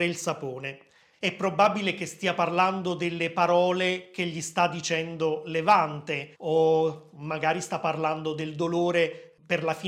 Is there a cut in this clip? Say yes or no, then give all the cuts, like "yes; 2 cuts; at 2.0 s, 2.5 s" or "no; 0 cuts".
yes; 2 cuts; at 1.1 s, 6.3 s